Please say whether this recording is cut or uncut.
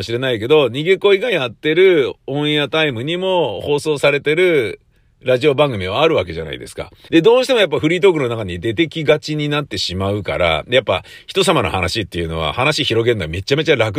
cut